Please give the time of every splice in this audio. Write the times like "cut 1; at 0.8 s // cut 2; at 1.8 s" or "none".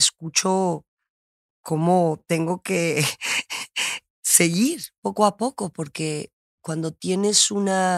none